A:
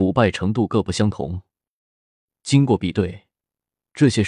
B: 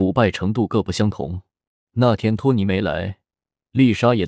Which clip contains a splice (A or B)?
B